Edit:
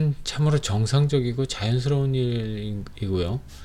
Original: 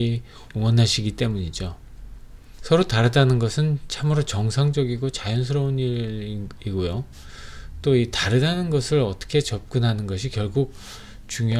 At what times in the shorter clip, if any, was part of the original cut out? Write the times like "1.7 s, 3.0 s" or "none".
none